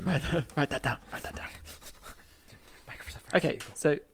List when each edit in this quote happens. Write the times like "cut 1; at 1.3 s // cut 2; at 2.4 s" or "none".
none